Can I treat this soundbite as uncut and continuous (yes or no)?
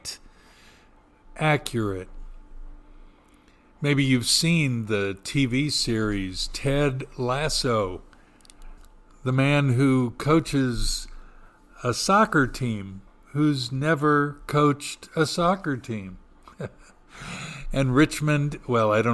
yes